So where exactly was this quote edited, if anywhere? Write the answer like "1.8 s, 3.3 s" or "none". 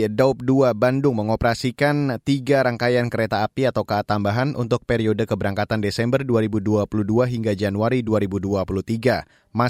none